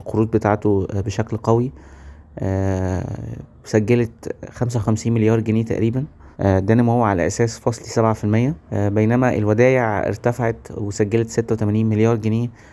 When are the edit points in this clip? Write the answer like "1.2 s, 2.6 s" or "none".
6.3 s, 8.6 s